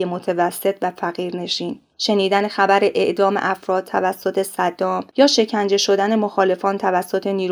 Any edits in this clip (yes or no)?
yes